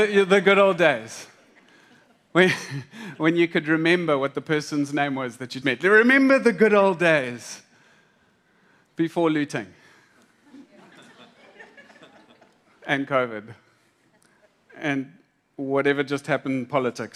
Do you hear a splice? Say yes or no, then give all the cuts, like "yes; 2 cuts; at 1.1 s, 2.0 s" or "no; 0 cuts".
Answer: yes; 1 cut; at 5.6 s